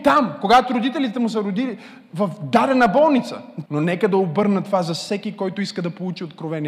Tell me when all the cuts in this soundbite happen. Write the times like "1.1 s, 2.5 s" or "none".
3.7 s